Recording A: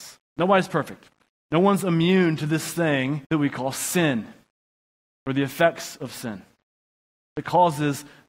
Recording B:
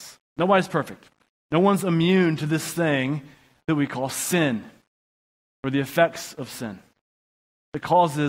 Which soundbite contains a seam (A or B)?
A